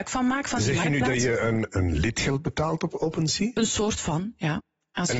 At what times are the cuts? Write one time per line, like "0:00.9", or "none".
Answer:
0:01.7

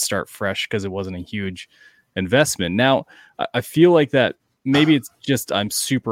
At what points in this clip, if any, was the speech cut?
none

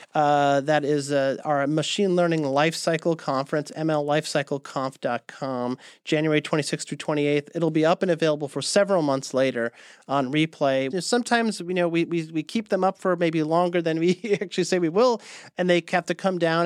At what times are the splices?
0:10.9

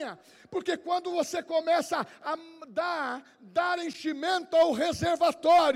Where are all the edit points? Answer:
none

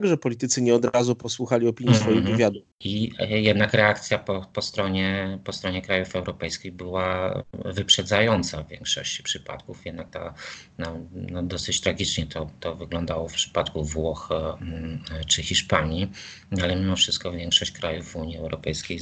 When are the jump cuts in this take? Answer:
0:02.7

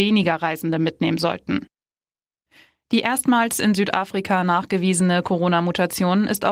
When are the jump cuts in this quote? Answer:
none

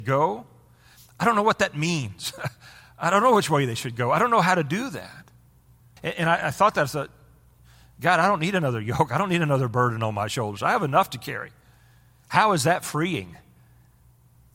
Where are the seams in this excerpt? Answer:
0:06.0

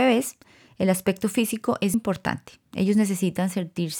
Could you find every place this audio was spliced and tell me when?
0:01.9

